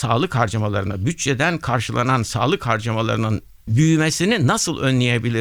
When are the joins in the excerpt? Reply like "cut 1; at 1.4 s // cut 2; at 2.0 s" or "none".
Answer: none